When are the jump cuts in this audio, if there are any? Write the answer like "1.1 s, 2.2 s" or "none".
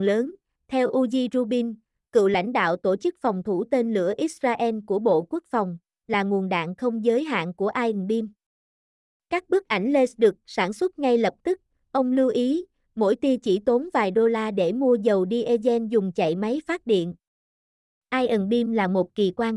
none